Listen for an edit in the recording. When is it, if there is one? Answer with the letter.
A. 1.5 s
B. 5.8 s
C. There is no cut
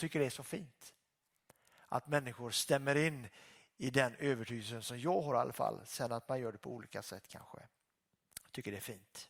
C